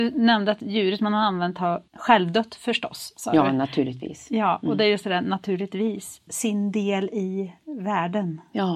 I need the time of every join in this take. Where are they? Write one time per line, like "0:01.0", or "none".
0:01.9
0:06.3